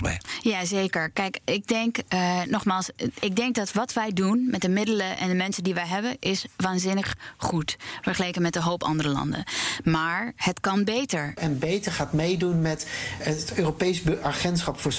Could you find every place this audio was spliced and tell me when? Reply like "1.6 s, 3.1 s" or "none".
11.4 s, 13.2 s